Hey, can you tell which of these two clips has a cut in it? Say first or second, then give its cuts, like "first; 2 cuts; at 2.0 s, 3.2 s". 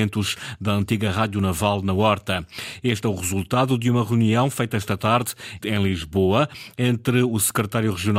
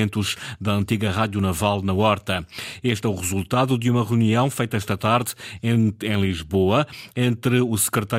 first; 1 cut; at 5.6 s